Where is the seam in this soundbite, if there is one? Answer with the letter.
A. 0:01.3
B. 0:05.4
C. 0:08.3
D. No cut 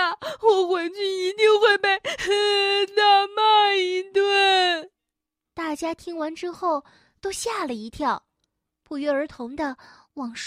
B